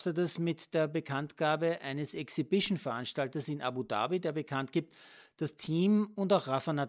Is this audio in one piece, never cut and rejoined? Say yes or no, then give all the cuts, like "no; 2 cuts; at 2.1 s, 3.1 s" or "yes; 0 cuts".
yes; 0 cuts